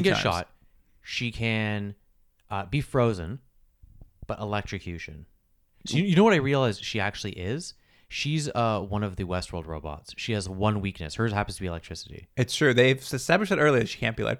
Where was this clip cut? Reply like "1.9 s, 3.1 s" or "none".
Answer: none